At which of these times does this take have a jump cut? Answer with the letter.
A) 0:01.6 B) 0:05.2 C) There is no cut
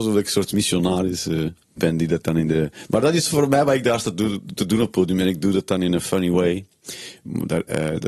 A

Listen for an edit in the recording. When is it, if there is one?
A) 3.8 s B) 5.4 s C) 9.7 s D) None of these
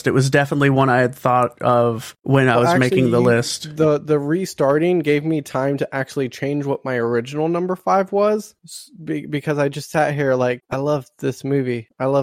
D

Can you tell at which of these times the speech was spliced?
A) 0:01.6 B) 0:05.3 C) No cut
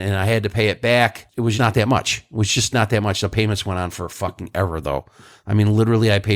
A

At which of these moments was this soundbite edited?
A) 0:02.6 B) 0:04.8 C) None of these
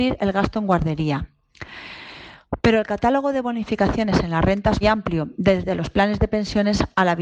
B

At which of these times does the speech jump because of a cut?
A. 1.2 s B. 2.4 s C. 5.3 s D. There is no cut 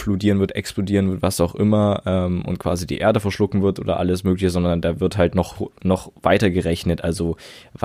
D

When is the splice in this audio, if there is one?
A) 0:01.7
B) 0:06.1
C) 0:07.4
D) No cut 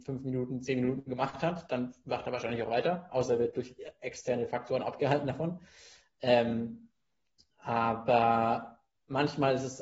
D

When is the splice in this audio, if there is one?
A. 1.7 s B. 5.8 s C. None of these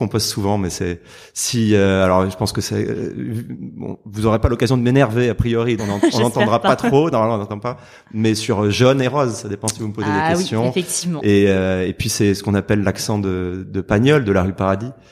B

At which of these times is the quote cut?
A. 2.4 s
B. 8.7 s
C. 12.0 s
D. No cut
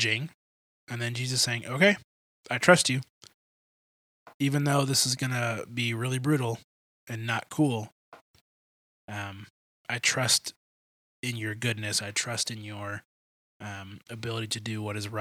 C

